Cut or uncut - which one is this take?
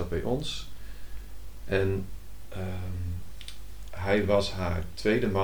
uncut